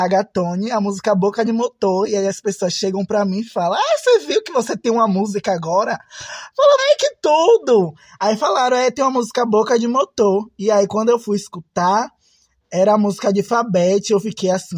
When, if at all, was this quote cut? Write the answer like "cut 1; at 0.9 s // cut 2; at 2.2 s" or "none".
cut 1; at 6.8 s